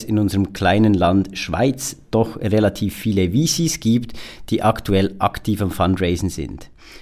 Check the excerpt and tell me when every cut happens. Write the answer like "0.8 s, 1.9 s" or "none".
none